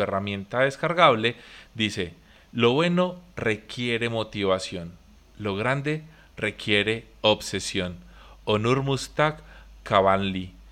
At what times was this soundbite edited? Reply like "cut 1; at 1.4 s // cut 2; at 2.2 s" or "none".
none